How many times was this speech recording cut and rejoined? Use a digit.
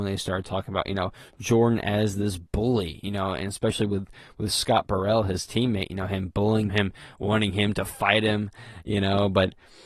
1